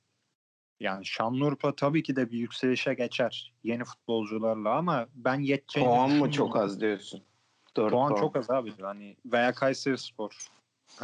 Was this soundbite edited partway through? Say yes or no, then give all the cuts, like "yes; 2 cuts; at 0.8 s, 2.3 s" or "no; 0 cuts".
yes; 1 cut; at 8.8 s